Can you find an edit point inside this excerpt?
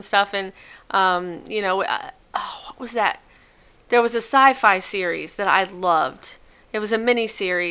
no; 0 cuts

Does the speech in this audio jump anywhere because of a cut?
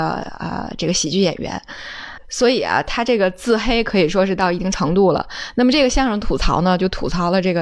no; 0 cuts

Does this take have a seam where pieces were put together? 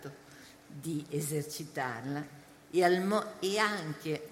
no; 0 cuts

